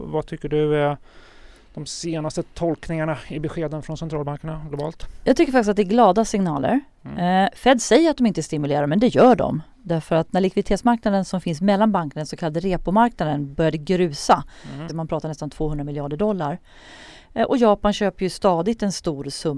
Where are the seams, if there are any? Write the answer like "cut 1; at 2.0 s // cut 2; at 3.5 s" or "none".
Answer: cut 1; at 14.9 s // cut 2; at 17.2 s